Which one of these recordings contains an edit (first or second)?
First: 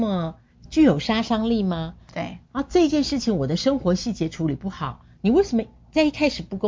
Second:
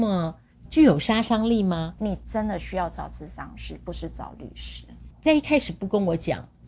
second